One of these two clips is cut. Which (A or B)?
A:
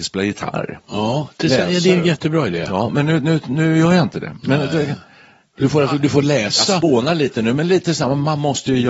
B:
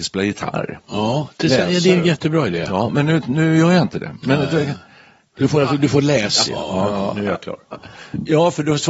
B